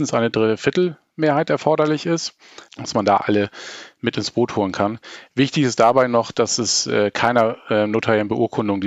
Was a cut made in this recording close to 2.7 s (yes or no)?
yes